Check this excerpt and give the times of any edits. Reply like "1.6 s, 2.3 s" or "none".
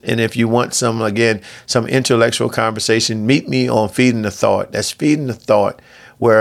none